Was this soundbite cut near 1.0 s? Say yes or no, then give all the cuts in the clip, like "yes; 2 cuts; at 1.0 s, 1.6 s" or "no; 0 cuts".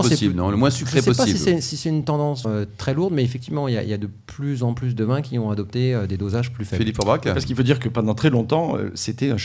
no; 1 cut; at 2.4 s